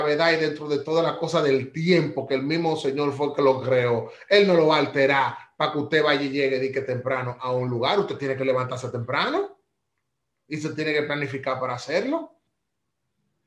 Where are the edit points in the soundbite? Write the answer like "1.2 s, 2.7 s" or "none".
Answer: none